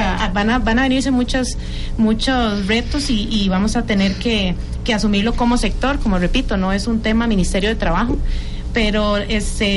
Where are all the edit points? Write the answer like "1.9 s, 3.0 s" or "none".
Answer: none